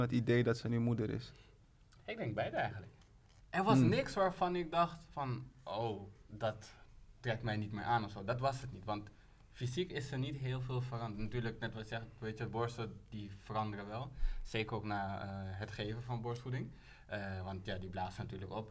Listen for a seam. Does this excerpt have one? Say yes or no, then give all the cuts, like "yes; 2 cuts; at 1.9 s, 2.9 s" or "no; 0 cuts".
yes; 1 cut; at 3.4 s